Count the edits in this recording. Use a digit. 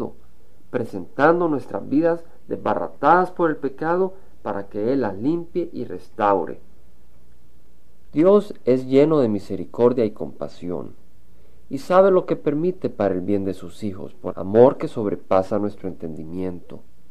2